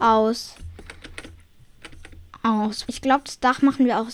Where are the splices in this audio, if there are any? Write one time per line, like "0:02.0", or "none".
0:02.9